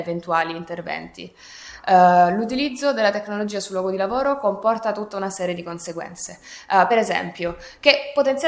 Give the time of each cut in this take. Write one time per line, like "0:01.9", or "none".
none